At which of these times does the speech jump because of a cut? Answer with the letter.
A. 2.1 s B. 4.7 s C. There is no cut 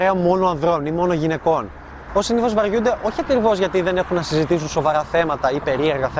A